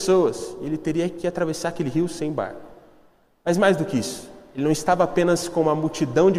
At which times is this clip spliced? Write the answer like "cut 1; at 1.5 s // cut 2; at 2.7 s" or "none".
none